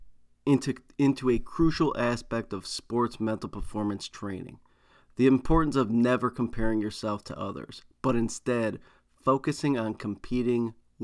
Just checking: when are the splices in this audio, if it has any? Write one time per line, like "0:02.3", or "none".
none